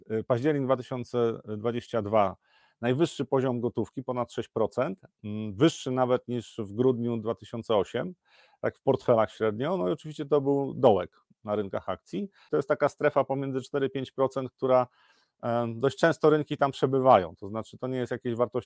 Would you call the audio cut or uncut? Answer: cut